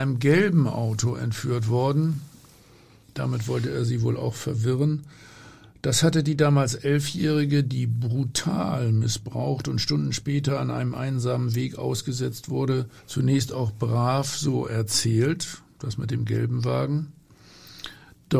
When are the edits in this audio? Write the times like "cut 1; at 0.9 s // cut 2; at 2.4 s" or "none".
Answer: cut 1; at 13.0 s